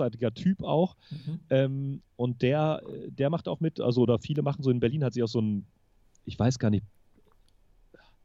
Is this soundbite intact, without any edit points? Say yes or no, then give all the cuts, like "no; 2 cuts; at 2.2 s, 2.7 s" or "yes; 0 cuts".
yes; 0 cuts